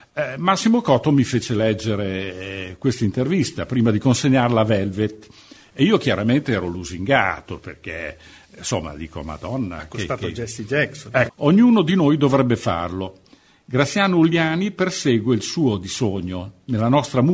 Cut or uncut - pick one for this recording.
cut